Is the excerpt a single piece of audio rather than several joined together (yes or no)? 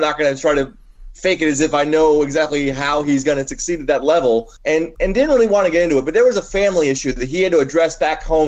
no